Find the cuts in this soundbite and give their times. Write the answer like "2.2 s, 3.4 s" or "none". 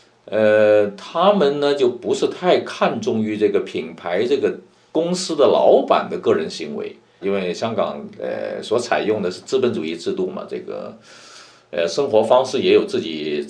7.2 s